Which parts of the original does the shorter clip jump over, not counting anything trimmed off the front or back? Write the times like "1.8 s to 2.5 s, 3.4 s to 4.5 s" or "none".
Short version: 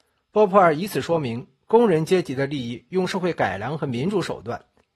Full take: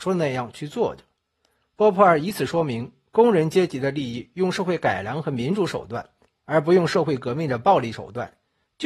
none